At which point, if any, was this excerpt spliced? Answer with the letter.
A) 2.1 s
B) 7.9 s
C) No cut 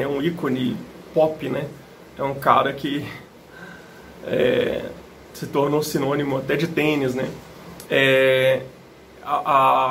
B